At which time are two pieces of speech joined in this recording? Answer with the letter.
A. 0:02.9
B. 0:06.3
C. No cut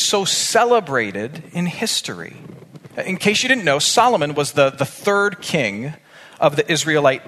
A